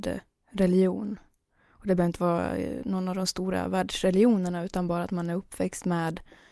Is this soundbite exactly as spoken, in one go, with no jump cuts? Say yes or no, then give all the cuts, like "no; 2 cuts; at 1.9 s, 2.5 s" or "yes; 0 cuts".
yes; 0 cuts